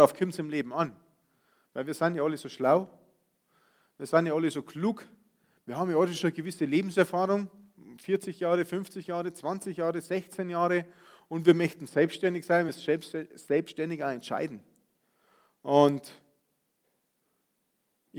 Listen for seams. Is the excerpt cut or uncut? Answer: uncut